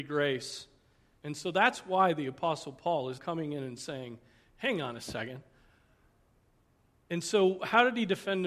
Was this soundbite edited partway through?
yes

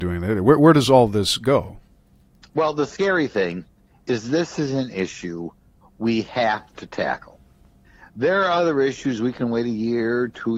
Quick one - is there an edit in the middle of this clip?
no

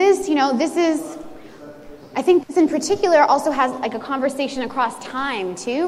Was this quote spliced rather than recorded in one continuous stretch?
no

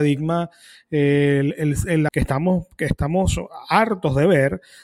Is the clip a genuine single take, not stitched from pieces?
no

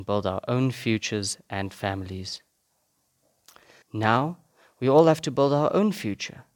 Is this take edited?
yes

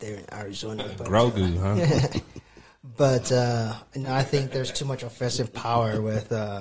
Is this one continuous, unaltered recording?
yes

